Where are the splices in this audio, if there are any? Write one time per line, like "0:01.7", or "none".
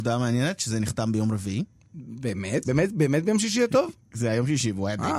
0:02.6

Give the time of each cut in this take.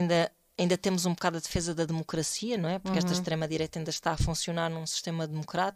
none

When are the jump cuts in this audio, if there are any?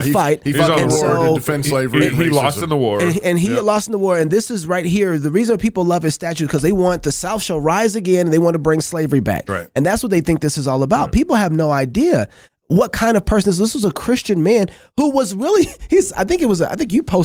none

